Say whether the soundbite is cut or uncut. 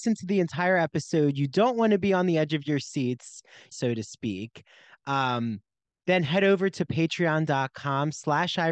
cut